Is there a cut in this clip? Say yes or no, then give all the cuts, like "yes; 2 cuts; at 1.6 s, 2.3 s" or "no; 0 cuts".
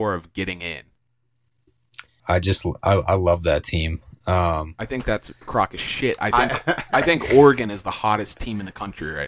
yes; 1 cut; at 2.2 s